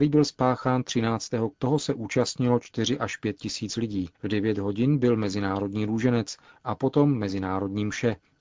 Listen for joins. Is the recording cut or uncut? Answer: cut